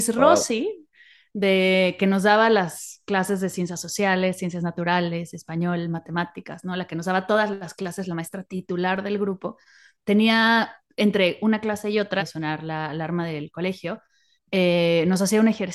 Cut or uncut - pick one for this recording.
cut